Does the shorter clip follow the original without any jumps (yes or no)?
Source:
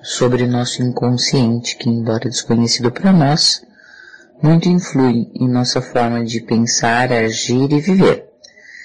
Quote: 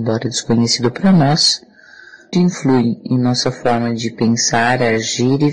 no